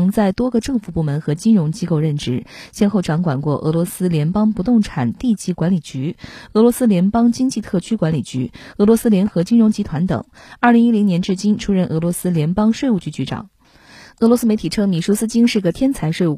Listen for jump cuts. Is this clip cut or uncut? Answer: uncut